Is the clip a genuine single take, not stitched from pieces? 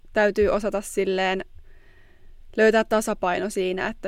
yes; 0 cuts

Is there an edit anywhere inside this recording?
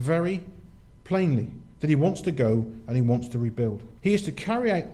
yes; 1 cut; at 4.0 s

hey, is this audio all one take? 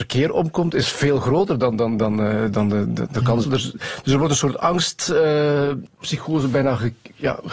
no; 1 cut; at 3.4 s

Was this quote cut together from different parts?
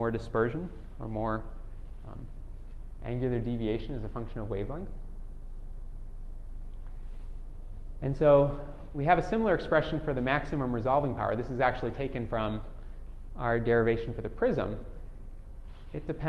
no; 0 cuts

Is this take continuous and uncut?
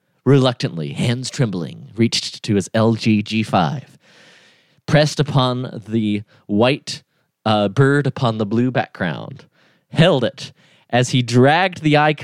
yes; 0 cuts

